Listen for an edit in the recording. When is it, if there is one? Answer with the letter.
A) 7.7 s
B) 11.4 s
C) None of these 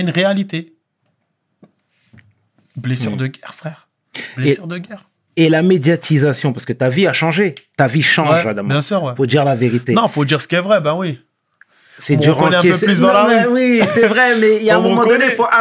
C